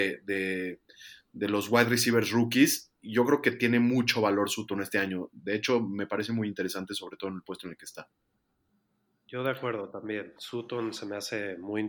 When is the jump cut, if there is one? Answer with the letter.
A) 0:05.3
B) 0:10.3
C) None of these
C